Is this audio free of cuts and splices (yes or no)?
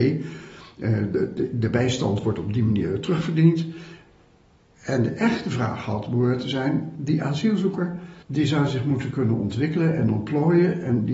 no